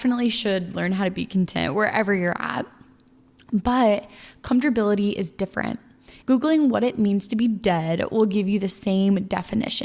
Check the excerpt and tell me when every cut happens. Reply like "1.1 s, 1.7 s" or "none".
6.2 s

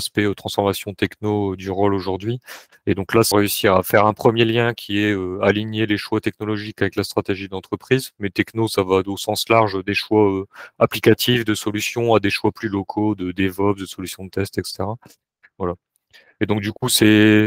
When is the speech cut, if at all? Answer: 3.3 s

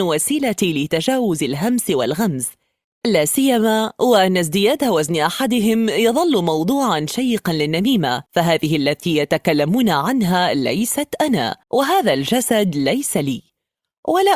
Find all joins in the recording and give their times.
8.3 s, 11.6 s

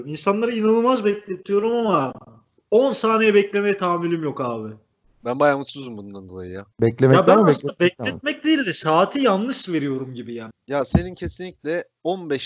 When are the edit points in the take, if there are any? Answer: 6.7 s, 10.5 s

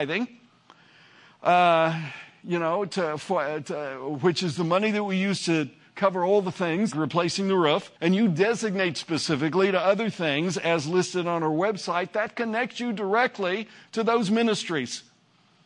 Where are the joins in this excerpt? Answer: 6.9 s, 8.0 s

